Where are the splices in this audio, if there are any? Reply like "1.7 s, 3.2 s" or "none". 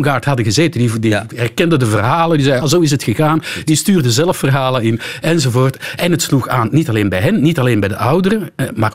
2.6 s